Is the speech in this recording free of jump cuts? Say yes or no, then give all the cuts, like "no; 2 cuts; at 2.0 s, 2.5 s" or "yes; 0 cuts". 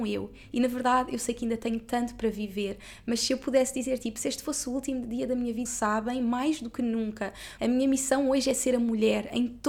no; 2 cuts; at 5.6 s, 7.6 s